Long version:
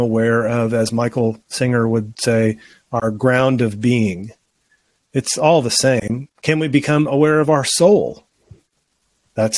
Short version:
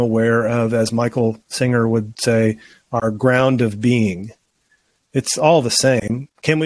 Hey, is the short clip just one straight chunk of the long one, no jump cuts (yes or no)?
yes